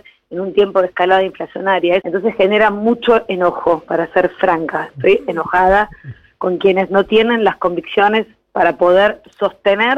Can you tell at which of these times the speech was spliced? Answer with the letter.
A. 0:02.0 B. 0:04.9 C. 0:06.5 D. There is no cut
A